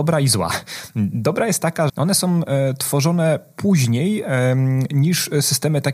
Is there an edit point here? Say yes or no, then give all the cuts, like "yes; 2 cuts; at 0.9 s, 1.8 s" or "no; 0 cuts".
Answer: yes; 1 cut; at 1.9 s